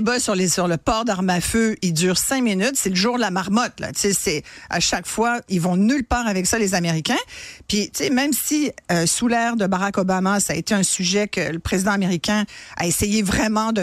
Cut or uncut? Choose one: uncut